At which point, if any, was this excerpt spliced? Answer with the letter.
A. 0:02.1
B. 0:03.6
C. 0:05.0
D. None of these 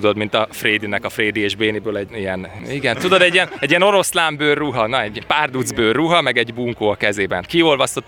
A